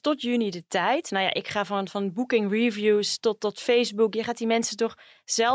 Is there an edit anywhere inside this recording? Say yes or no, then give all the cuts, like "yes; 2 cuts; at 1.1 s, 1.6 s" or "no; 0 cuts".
no; 0 cuts